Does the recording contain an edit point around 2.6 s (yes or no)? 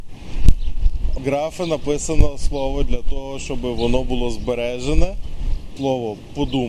no